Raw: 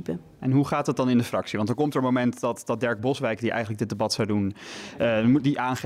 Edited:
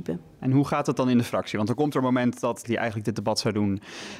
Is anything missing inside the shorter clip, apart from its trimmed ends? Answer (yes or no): yes